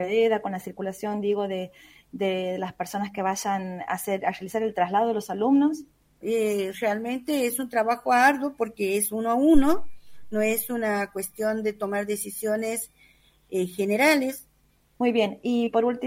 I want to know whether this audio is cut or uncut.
cut